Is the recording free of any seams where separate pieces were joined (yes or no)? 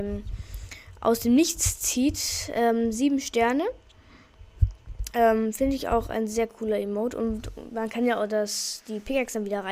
yes